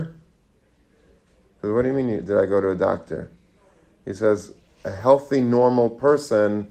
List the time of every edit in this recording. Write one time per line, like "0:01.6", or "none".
none